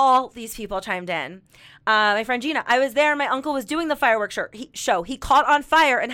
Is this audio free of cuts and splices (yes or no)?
yes